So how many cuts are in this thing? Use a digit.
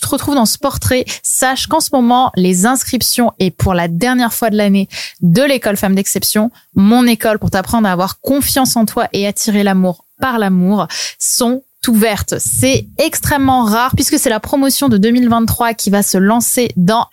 0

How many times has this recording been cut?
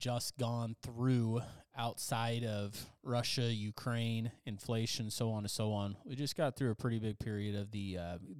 0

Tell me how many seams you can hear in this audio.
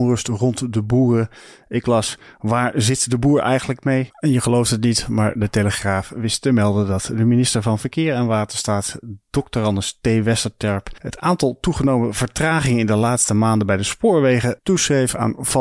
1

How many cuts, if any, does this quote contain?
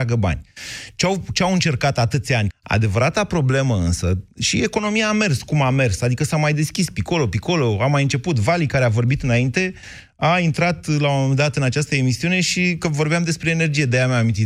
1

